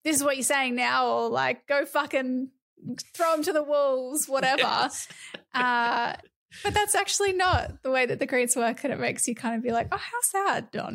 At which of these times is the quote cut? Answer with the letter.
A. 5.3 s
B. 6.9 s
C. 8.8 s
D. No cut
D